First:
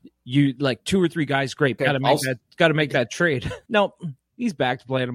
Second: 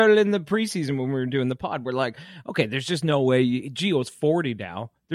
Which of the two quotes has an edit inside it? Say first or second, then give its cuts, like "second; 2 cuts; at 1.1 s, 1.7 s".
first; 2 cuts; at 1.8 s, 3.7 s